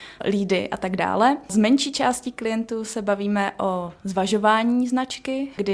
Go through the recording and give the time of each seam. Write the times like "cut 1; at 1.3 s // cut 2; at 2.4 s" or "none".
none